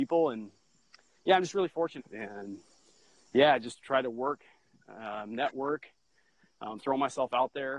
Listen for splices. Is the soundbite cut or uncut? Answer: cut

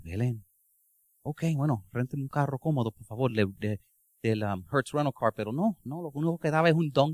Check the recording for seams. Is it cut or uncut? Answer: uncut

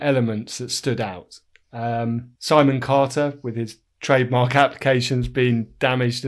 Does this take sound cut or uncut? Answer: cut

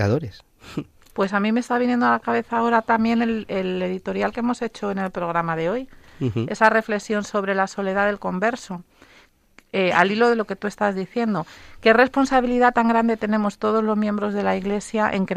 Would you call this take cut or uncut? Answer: uncut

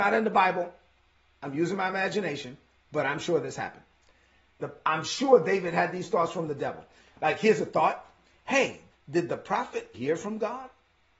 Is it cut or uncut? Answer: cut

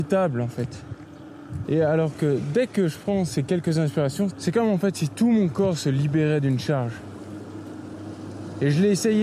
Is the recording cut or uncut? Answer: cut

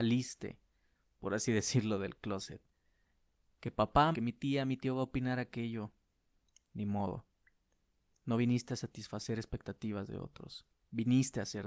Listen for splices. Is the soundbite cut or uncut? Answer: cut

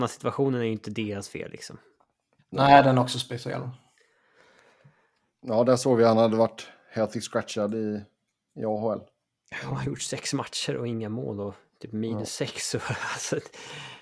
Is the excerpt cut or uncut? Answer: uncut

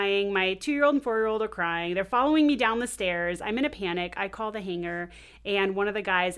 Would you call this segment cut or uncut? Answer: uncut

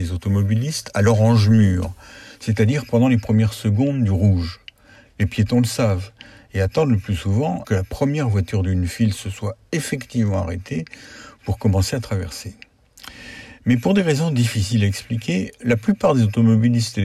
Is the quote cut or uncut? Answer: cut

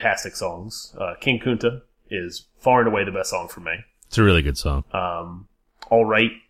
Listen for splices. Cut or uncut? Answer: uncut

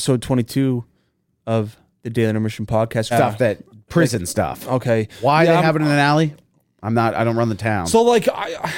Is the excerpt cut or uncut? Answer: cut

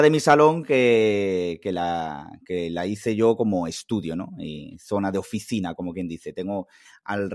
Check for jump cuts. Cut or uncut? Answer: uncut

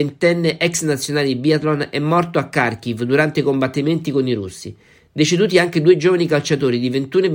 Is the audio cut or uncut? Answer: uncut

